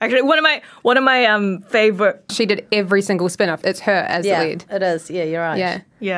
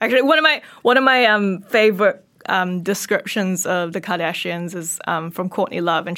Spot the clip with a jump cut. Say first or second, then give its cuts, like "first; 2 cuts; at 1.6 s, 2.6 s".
first; 2 cuts; at 2.3 s, 3.6 s